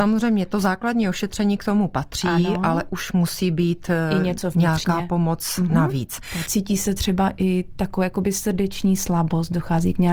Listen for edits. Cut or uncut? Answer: cut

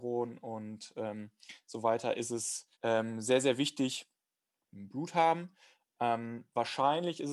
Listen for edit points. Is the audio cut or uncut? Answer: cut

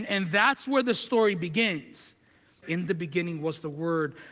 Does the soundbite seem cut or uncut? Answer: cut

